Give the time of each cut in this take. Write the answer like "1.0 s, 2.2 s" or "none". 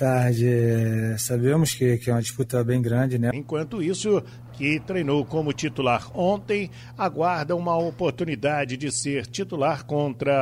3.3 s, 4.5 s